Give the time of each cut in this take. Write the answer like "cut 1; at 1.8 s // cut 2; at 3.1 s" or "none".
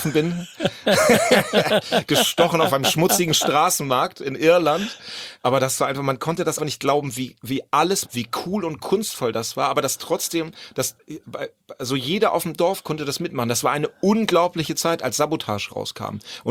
cut 1; at 6.6 s // cut 2; at 8.0 s